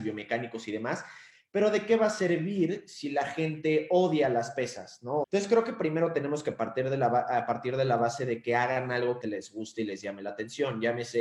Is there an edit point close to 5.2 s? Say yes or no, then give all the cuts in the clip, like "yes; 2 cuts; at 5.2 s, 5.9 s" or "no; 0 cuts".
yes; 2 cuts; at 5.2 s, 9.2 s